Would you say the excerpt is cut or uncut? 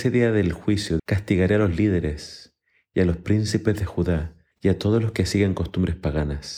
cut